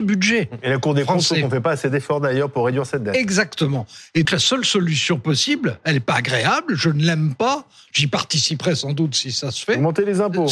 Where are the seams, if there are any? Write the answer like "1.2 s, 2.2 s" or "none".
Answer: 4.3 s